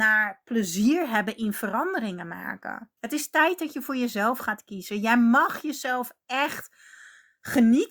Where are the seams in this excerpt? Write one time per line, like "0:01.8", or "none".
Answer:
0:03.0